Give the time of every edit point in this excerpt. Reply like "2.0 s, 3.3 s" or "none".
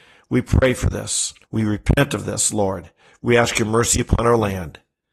1.4 s